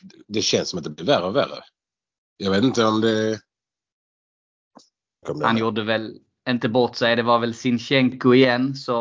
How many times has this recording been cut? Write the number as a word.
one